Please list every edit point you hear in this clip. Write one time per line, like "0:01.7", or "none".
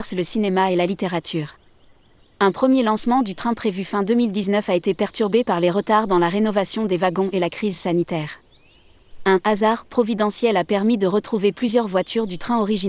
none